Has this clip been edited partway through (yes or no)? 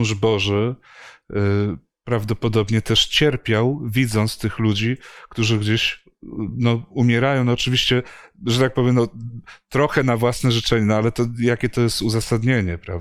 no